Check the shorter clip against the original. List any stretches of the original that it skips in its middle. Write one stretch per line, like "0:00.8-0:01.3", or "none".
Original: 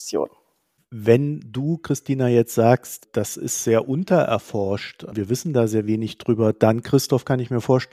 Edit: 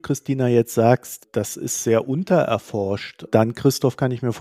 0:05.1-0:06.5